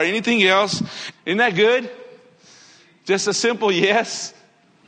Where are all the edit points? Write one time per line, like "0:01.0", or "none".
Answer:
0:01.1